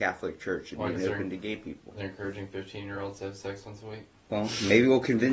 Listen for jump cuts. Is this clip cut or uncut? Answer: cut